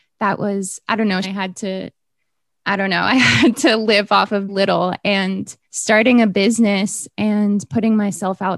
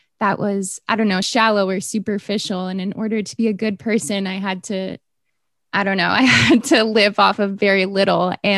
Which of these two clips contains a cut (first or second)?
first